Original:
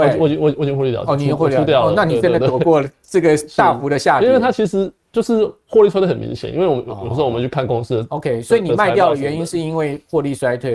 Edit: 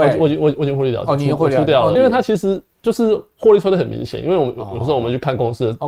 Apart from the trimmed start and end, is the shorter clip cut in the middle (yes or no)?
yes